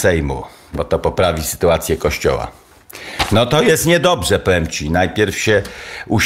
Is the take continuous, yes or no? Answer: yes